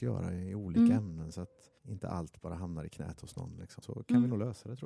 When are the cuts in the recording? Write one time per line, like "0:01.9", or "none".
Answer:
0:01.8
0:03.8